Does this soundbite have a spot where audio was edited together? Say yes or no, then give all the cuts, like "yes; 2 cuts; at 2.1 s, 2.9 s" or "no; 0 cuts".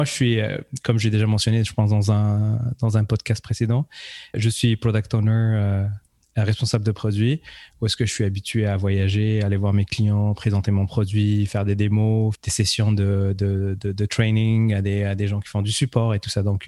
yes; 2 cuts; at 4.3 s, 12.4 s